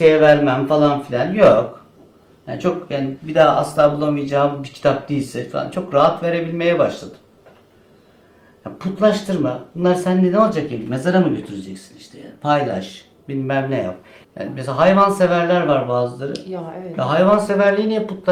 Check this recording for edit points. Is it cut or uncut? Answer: cut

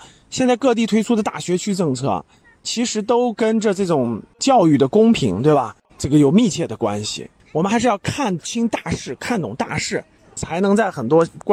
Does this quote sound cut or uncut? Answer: cut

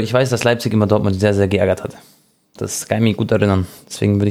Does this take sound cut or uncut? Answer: uncut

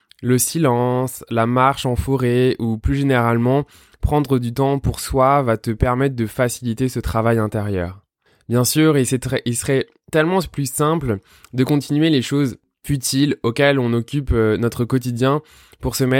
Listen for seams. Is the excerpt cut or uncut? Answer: uncut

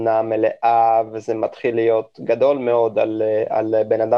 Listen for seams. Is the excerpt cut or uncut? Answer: uncut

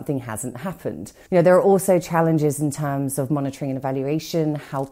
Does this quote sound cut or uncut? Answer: cut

